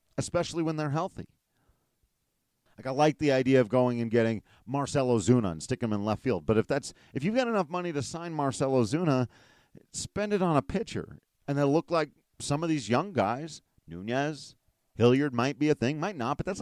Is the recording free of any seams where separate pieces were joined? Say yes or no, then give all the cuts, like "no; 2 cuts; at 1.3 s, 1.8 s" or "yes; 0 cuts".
no; 2 cuts; at 2.7 s, 11.3 s